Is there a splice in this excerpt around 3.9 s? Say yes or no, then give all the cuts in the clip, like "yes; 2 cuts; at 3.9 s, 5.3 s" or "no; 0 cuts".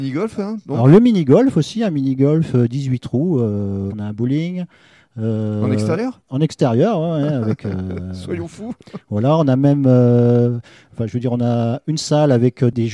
yes; 1 cut; at 3.9 s